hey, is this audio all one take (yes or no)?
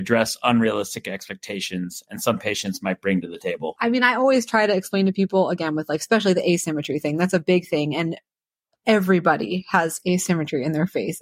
yes